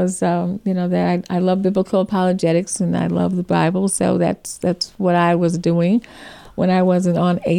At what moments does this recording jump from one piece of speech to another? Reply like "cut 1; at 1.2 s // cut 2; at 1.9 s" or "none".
none